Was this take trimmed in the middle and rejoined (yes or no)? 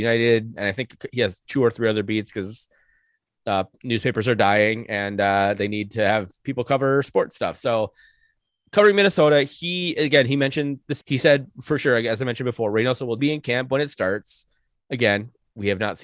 yes